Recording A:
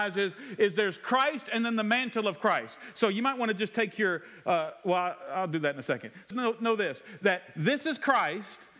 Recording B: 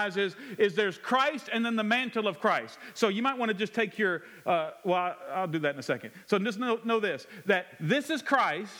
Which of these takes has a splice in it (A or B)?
A